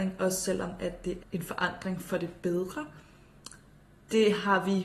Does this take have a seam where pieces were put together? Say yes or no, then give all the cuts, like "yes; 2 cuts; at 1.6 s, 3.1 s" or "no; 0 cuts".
yes; 1 cut; at 1.2 s